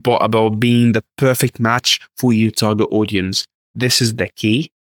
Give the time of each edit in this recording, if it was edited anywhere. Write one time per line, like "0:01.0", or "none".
none